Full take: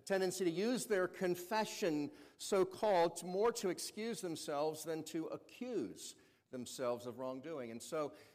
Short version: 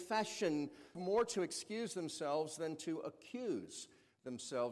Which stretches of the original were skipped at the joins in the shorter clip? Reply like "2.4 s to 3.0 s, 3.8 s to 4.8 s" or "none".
2.4 s to 3.2 s

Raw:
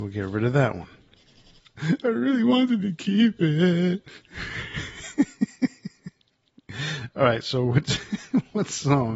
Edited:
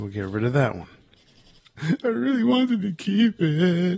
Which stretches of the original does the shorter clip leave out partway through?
none

